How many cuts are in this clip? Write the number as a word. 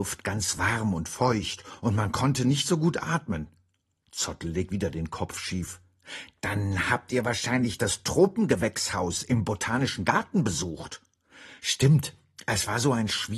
one